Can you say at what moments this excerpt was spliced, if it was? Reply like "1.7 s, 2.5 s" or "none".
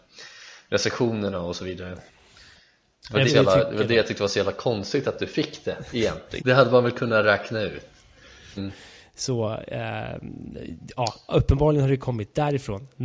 3.3 s, 6.4 s, 8.6 s